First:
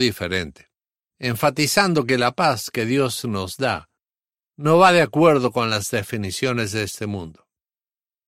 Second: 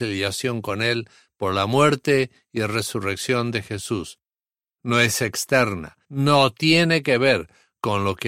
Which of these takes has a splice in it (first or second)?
second